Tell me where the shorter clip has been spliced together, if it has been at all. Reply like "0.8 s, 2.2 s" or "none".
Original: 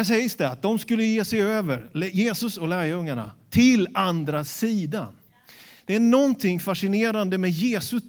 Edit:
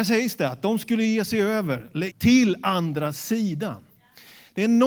2.1 s